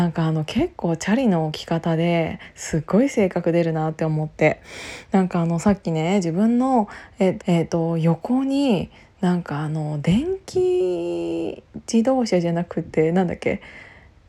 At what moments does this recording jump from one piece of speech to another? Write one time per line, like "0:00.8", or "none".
0:07.4